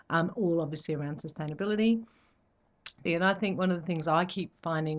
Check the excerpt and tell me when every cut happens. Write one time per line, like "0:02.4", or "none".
0:03.1